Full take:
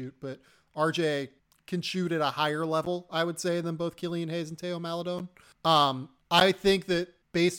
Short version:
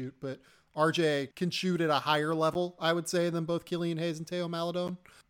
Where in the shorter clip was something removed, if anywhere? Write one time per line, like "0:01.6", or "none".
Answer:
0:01.3